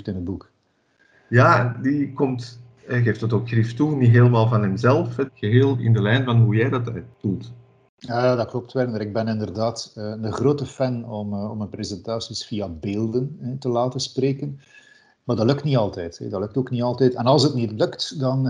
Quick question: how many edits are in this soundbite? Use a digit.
1